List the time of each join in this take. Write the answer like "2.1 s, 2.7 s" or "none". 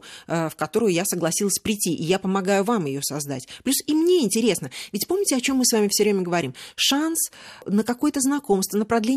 6.7 s